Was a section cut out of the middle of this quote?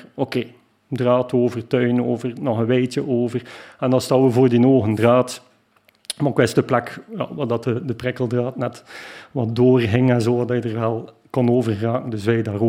no; 0 cuts

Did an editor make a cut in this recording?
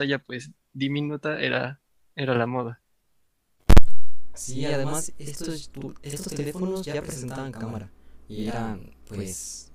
no; 0 cuts

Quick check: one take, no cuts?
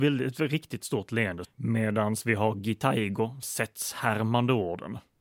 no; 2 cuts; at 1.4 s, 3.4 s

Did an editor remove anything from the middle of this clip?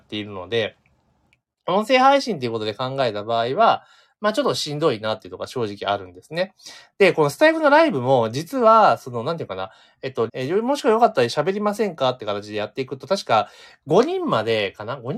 yes; 1 cut; at 10.3 s

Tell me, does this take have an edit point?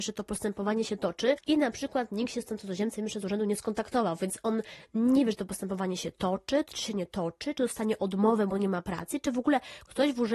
no; 0 cuts

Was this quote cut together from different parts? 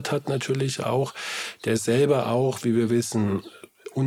no; 0 cuts

